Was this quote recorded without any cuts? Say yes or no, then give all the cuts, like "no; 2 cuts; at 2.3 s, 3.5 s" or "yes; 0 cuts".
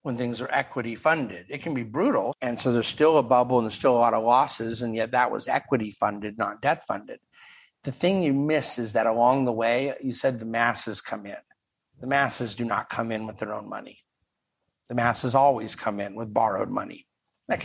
no; 1 cut; at 2.3 s